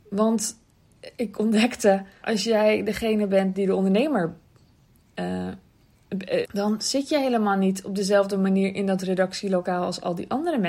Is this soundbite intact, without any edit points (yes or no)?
no